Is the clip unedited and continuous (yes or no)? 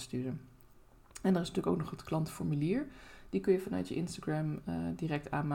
yes